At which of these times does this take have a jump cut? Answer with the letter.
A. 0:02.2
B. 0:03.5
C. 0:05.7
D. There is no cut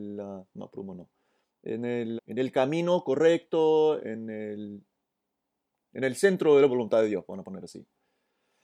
A